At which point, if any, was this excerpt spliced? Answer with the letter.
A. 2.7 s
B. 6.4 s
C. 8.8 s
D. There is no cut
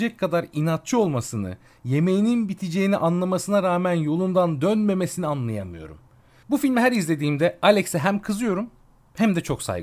B